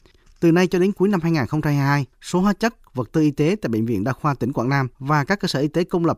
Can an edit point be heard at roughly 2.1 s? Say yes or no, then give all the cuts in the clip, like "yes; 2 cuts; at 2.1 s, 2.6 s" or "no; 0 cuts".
yes; 2 cuts; at 2.1 s, 4.9 s